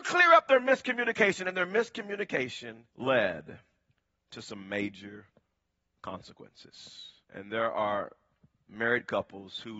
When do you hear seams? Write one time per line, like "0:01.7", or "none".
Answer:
0:02.9
0:07.2